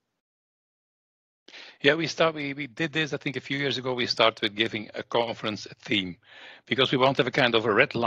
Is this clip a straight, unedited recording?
yes; 0 cuts

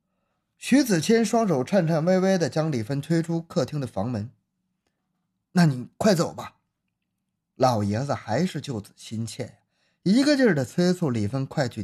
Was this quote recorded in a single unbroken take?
yes; 0 cuts

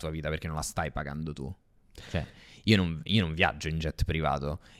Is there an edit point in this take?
no; 0 cuts

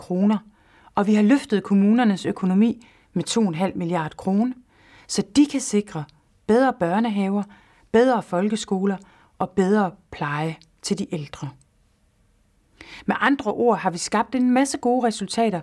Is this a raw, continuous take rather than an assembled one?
yes; 0 cuts

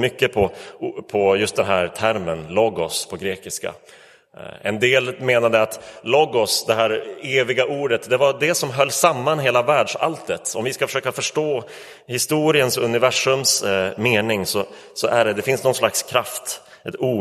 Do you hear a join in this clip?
no; 0 cuts

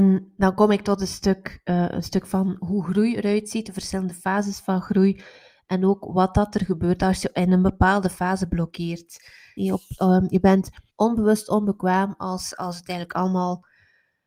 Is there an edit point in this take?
yes; 2 cuts; at 9.6 s, 10.9 s

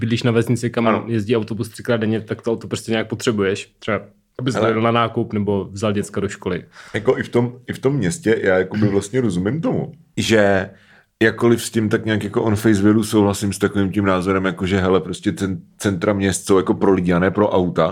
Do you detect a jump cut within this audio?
no; 0 cuts

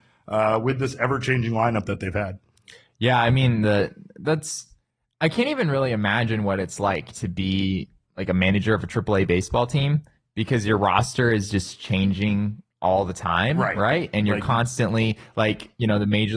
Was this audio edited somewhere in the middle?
no; 0 cuts

